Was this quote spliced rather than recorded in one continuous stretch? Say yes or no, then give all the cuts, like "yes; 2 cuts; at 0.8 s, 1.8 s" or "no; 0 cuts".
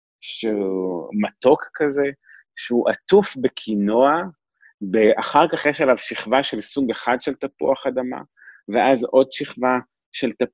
no; 0 cuts